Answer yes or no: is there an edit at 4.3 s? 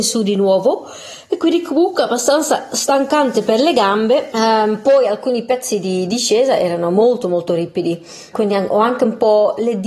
yes